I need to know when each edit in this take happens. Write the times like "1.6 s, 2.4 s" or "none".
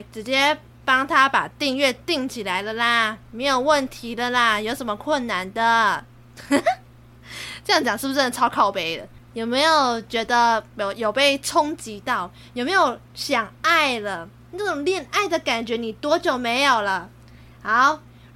9.3 s